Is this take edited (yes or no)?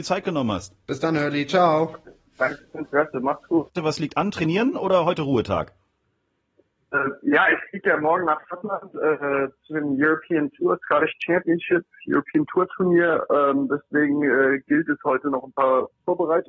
yes